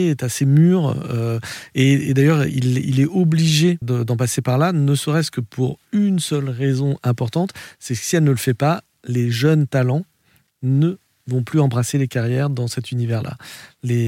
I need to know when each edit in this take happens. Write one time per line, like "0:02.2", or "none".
0:03.8